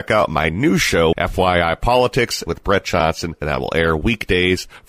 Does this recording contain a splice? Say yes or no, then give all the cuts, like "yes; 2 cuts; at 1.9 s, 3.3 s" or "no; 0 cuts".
yes; 1 cut; at 1.1 s